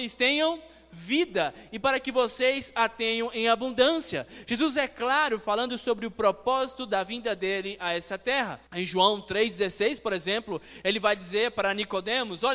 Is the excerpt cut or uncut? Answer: cut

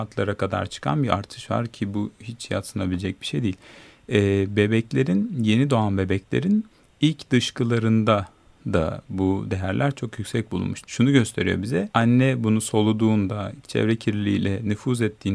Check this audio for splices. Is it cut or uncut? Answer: cut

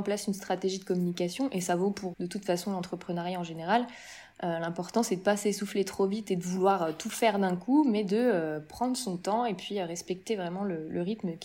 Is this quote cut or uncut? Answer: cut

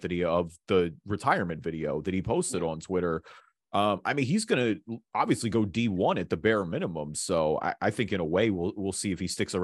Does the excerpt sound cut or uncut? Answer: uncut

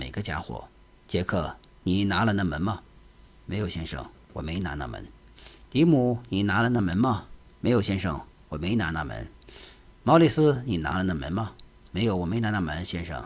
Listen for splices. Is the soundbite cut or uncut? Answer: uncut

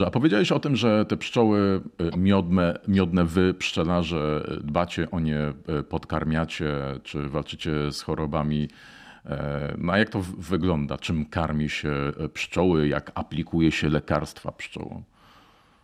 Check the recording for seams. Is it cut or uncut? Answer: uncut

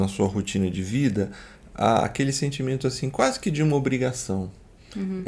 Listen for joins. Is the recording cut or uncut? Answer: uncut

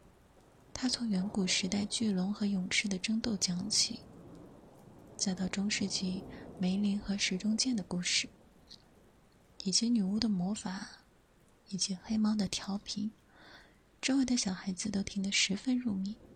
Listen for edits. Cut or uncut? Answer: uncut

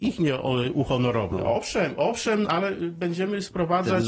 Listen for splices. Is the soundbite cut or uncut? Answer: cut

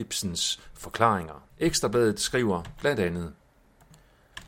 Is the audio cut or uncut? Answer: cut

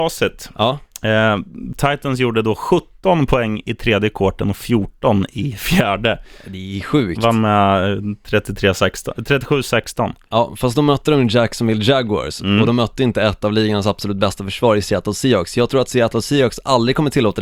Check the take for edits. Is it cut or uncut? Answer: uncut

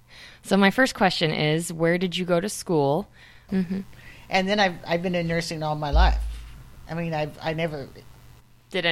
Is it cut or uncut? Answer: cut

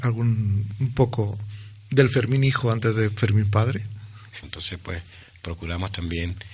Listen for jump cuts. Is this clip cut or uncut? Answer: cut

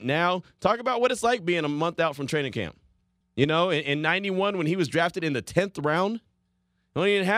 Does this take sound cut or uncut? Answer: uncut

